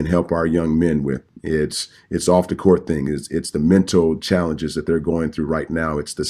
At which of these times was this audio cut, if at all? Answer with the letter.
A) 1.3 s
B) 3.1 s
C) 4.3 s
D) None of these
D